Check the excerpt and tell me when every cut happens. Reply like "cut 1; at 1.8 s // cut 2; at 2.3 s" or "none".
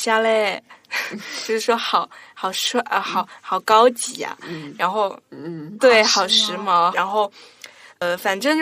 cut 1; at 5.8 s // cut 2; at 6.9 s